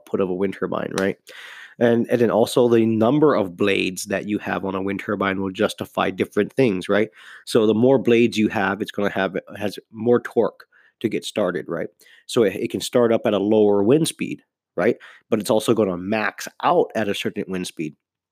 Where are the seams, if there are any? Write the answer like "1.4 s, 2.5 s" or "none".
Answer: none